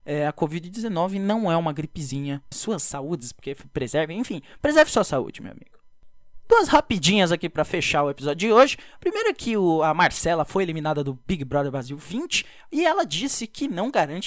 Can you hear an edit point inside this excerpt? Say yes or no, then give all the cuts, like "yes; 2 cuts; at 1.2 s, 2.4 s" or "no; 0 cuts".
yes; 1 cut; at 2.5 s